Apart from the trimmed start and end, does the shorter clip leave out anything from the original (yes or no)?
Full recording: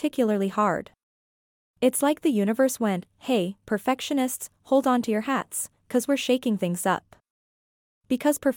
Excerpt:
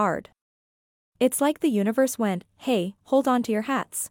yes